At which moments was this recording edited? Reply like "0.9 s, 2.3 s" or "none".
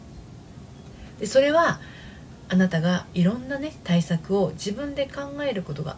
none